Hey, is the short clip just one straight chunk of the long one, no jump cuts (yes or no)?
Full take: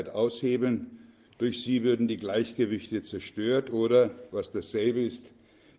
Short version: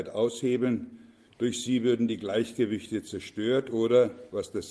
yes